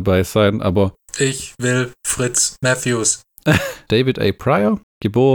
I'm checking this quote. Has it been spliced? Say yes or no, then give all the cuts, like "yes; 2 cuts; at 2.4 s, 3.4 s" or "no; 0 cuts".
yes; 1 cut; at 3.9 s